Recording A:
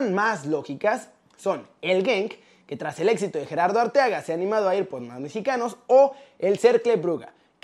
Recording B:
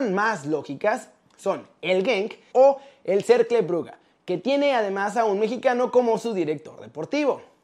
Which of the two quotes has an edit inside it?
B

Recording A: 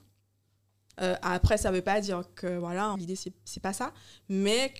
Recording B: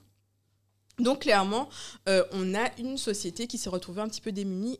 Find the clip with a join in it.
A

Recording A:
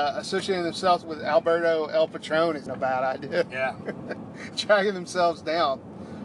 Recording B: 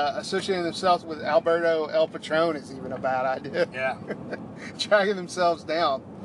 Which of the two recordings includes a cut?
A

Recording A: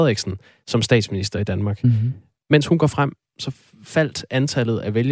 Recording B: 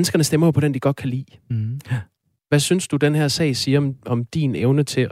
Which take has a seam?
B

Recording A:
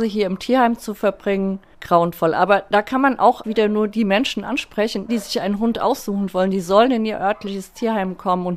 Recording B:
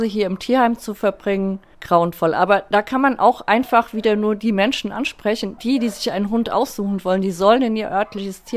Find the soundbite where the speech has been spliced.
A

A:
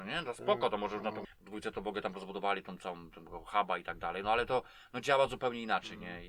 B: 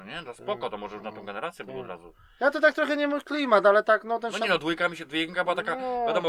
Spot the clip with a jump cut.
A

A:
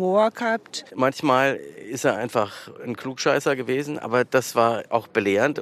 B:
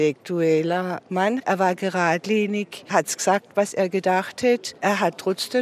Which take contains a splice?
B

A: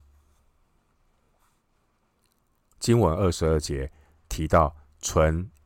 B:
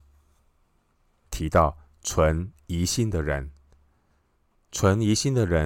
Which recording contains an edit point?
B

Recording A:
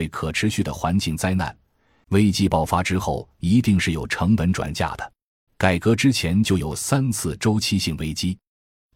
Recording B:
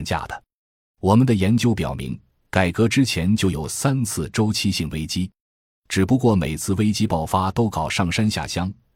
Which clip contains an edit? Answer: A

